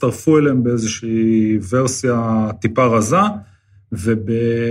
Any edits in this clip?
no; 0 cuts

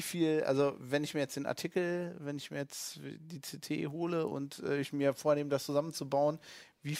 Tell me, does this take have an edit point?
no; 0 cuts

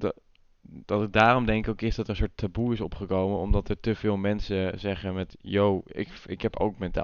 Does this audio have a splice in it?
no; 0 cuts

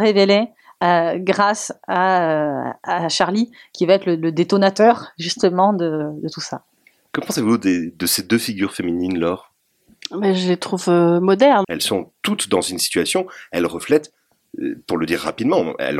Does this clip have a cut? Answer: yes; 1 cut; at 11.6 s

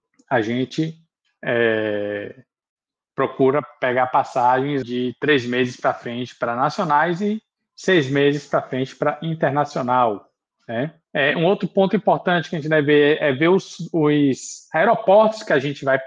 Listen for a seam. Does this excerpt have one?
yes; 2 cuts; at 4.8 s, 11.0 s

